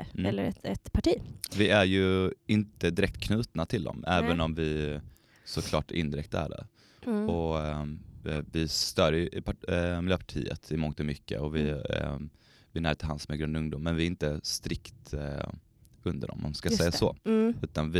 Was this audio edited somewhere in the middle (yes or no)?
no